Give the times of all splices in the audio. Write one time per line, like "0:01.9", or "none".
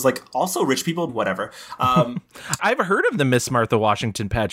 0:01.1
0:02.6